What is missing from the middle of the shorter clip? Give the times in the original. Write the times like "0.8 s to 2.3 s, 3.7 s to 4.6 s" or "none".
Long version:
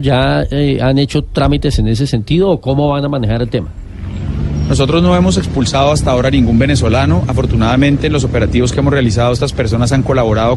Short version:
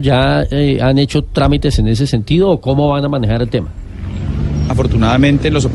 4.7 s to 7.3 s